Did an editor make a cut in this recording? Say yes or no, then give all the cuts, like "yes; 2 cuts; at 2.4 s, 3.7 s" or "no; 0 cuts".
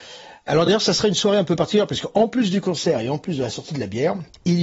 no; 0 cuts